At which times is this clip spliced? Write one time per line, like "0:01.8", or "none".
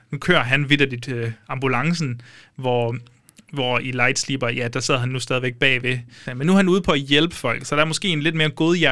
0:06.3